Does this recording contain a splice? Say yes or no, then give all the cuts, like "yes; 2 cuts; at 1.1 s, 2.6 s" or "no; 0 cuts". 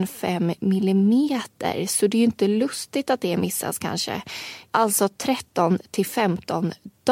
yes; 1 cut; at 4.7 s